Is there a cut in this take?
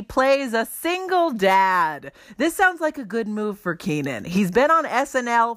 no; 0 cuts

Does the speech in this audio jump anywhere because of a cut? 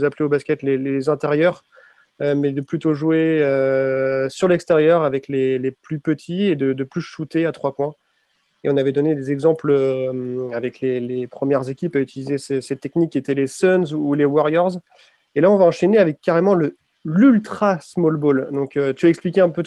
no; 0 cuts

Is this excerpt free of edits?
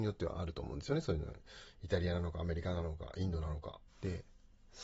no; 1 cut; at 3.9 s

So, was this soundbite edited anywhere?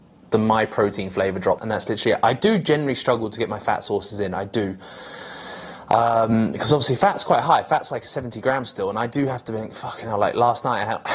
yes; 1 cut; at 1.6 s

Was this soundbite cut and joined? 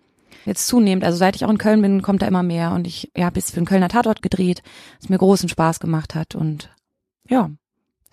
no; 0 cuts

